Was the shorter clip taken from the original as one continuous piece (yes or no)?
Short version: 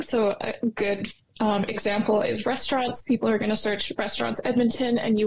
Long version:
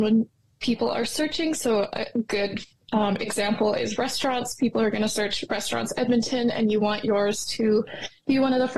yes